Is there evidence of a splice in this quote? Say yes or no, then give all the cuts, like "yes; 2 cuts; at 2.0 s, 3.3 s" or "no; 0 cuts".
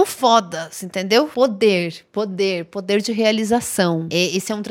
no; 0 cuts